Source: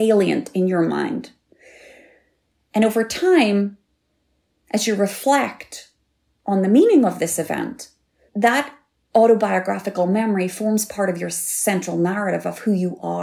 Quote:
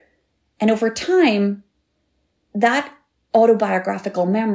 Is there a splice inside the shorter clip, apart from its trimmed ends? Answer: yes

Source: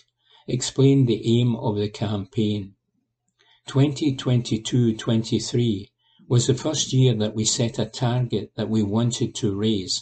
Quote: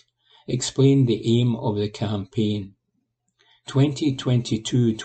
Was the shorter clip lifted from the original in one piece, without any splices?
yes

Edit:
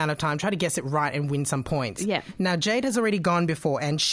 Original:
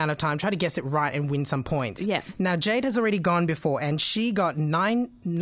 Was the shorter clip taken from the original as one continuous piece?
yes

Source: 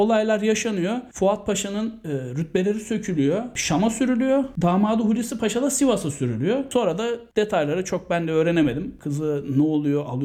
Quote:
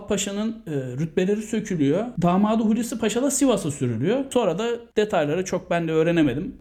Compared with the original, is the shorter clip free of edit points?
no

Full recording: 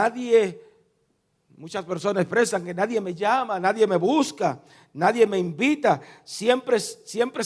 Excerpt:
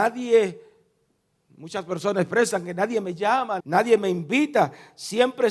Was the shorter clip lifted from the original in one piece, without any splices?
no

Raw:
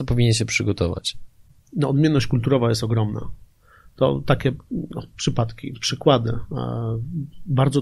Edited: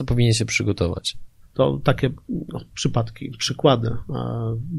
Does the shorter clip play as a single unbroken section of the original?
no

